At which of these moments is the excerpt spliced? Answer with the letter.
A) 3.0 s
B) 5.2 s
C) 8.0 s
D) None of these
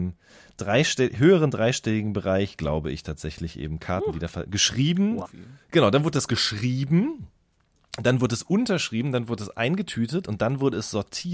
B